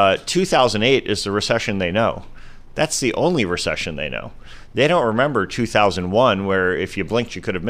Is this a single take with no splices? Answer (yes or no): yes